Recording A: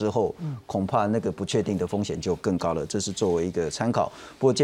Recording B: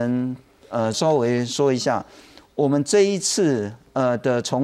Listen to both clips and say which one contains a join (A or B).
B